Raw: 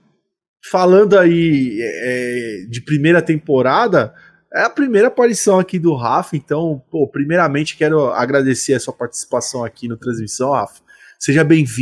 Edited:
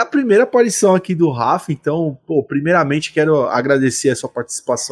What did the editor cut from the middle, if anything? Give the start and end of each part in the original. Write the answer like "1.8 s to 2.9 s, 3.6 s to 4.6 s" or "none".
none